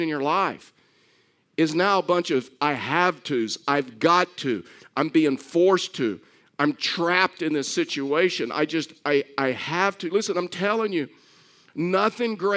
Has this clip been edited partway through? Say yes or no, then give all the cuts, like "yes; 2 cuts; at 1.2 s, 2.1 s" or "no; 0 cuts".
no; 0 cuts